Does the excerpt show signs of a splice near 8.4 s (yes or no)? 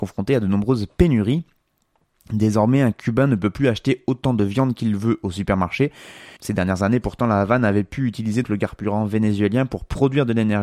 yes